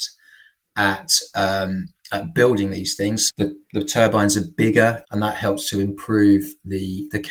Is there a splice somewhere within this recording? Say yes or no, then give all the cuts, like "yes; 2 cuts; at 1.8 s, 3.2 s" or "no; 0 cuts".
yes; 2 cuts; at 3.3 s, 5.0 s